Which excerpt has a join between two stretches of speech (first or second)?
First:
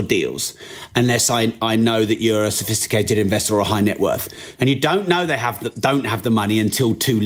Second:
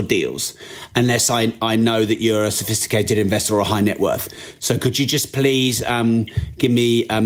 first